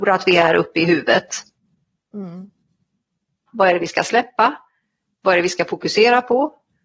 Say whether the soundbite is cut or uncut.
cut